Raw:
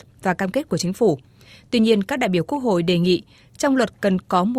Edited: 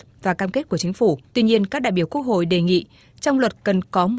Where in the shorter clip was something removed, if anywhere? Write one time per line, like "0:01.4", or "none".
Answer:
0:01.3

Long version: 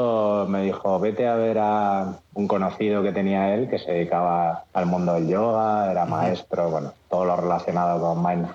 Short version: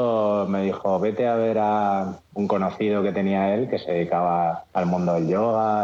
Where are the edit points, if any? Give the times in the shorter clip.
none

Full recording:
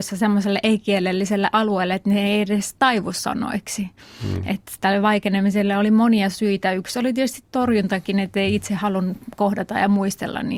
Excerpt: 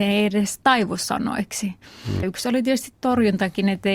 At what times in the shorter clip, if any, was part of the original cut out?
0:02.2

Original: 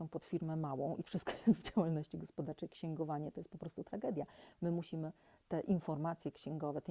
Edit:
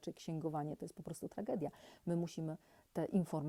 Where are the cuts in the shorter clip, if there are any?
none

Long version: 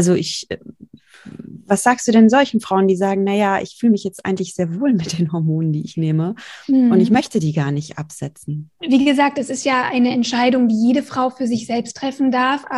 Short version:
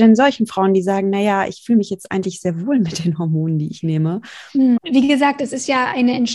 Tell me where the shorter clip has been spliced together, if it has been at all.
0:04.8

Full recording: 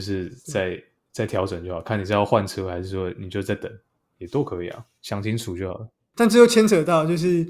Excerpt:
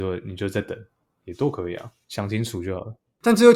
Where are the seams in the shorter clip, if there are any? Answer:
none

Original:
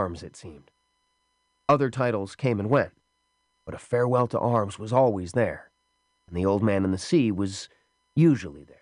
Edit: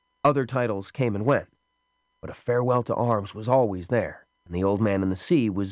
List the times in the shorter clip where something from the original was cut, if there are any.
0:04.3

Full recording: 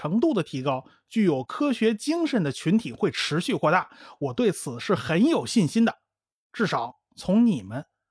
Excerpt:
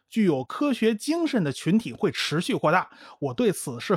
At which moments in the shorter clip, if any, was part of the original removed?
none

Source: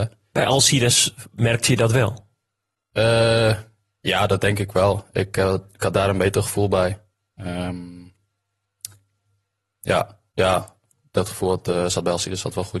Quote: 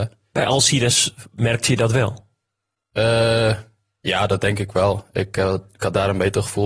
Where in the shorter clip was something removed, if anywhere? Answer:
none

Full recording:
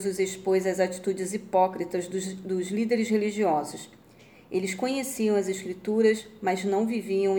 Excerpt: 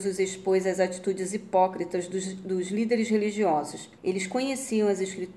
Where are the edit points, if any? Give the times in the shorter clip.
0:04.0

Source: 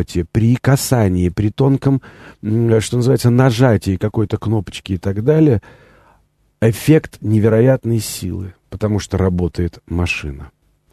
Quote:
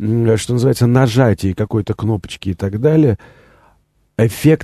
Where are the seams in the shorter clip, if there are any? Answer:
none

